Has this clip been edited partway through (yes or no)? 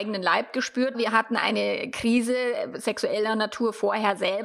yes